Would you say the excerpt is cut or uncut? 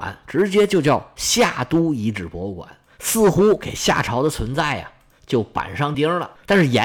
cut